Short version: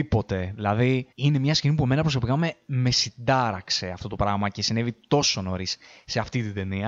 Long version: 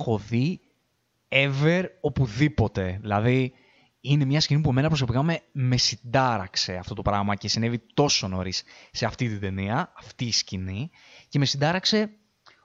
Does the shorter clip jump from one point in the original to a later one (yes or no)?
yes